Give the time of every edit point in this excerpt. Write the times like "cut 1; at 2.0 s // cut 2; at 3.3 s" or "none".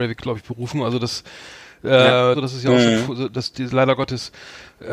cut 1; at 2.3 s // cut 2; at 3.5 s